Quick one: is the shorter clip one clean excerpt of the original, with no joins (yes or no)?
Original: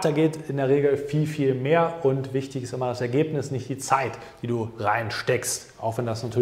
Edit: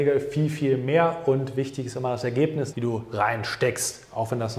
no